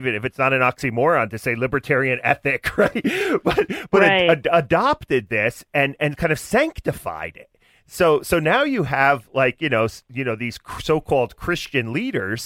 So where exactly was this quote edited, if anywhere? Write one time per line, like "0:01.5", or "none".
none